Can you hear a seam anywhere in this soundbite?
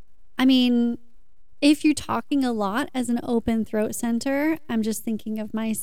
no; 0 cuts

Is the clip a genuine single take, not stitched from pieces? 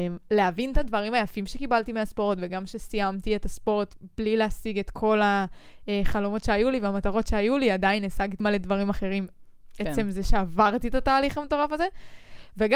no; 1 cut; at 8.4 s

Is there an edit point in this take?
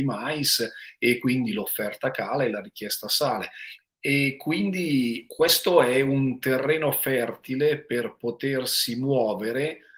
yes; 2 cuts; at 3.8 s, 5.3 s

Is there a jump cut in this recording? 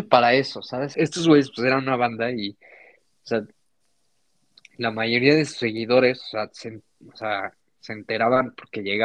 yes; 1 cut; at 0.9 s

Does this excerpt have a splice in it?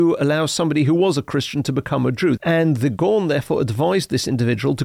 yes; 1 cut; at 2.4 s

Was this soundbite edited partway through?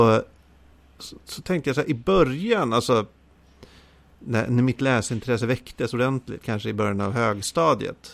no; 0 cuts

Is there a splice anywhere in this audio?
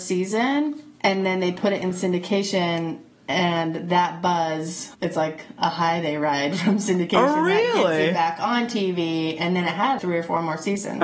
yes; 2 cuts; at 4.9 s, 10.0 s

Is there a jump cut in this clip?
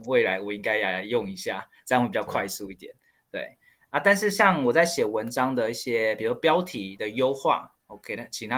no; 0 cuts

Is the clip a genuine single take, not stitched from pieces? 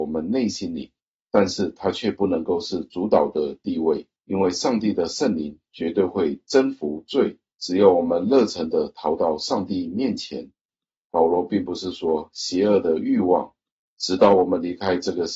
no; 2 cuts; at 10.7 s, 13.8 s

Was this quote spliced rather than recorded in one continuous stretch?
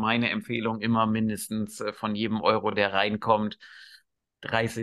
no; 0 cuts

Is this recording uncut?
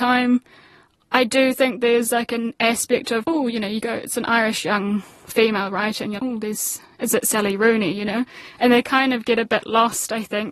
no; 2 cuts; at 3.2 s, 6.2 s

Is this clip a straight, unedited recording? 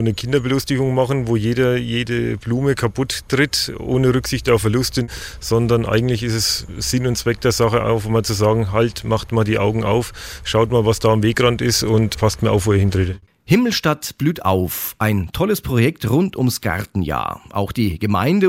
yes; 0 cuts

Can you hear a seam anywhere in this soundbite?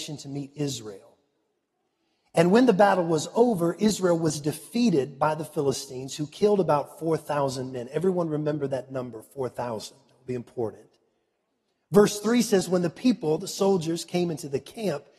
no; 0 cuts

